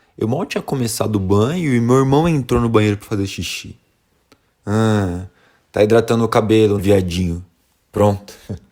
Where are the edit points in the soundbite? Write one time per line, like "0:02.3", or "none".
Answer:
0:06.8